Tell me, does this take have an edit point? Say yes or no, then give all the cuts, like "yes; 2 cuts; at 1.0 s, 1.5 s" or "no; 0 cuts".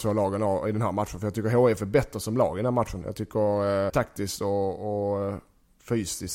yes; 1 cut; at 3.9 s